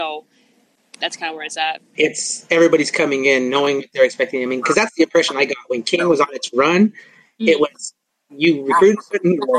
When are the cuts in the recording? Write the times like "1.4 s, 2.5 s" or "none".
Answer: 2.0 s